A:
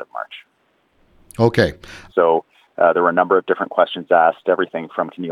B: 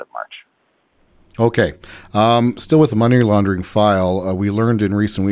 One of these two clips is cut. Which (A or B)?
A